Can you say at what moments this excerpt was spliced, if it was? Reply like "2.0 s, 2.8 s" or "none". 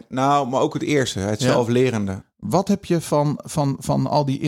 2.2 s